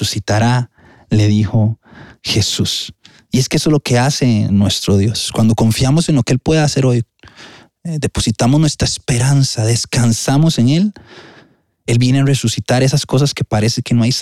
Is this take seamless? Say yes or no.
yes